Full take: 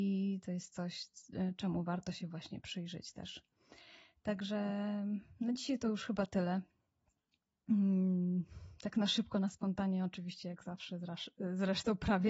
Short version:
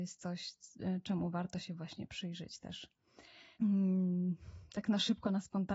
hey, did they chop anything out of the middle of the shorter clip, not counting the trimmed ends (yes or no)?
yes